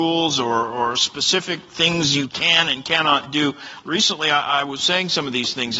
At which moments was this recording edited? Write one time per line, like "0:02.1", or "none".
0:03.8